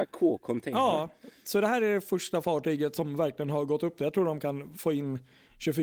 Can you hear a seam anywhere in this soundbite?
no; 0 cuts

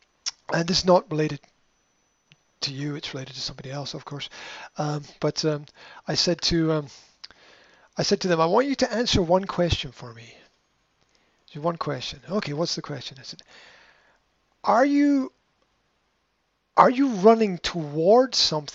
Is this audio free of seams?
yes; 0 cuts

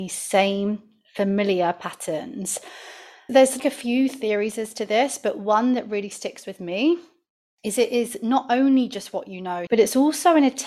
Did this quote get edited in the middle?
yes; 2 cuts; at 3.6 s, 9.7 s

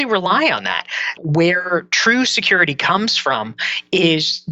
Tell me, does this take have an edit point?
no; 0 cuts

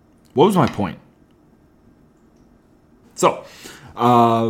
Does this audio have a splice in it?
yes; 1 cut; at 3.0 s

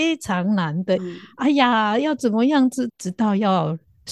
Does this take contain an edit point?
yes; 2 cuts; at 1.0 s, 2.9 s

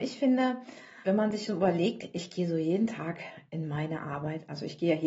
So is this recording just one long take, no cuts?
no; 1 cut; at 1.0 s

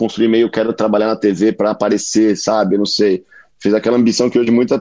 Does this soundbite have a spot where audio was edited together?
no; 0 cuts

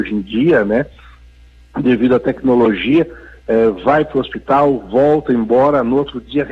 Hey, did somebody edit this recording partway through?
no; 0 cuts

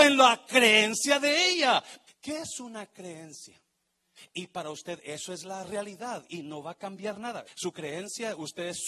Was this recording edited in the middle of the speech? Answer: yes; 3 cuts; at 2.1 s, 4.2 s, 7.5 s

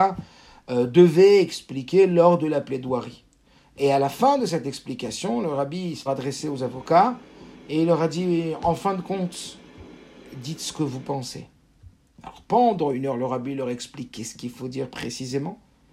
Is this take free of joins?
no; 1 cut; at 6.1 s

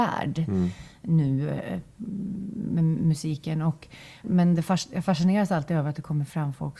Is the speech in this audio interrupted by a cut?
yes; 1 cut; at 4.2 s

